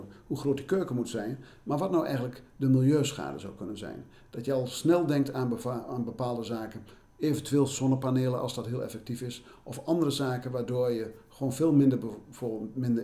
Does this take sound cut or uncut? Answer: uncut